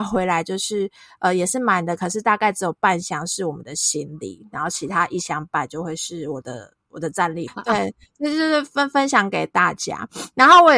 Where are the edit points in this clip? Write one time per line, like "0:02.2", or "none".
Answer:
0:07.5